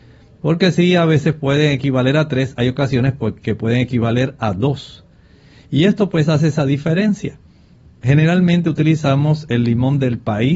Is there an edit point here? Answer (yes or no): no